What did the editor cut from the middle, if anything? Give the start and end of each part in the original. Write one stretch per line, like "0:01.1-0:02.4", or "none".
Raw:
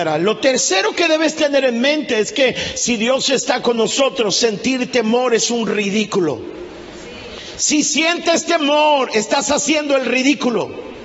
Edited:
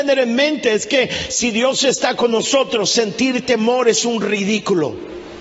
none